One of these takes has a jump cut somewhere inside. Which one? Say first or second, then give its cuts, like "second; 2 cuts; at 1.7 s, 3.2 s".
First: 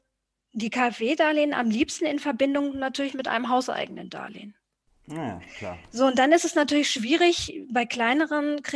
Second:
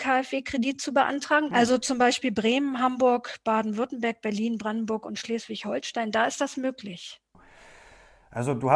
second; 1 cut; at 1.5 s